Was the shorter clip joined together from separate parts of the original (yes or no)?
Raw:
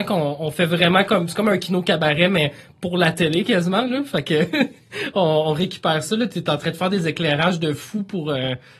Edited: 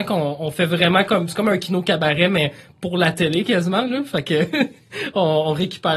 no